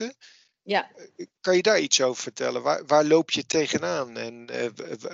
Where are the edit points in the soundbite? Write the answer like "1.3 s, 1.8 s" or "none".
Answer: none